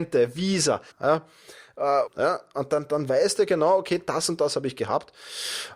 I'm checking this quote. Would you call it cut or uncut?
cut